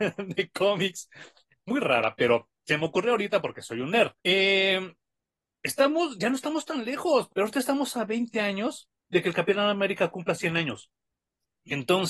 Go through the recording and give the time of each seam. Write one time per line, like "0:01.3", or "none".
0:04.2
0:07.3
0:09.0